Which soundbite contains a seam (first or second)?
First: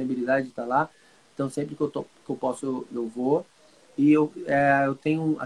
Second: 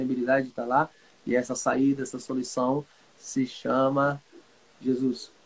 second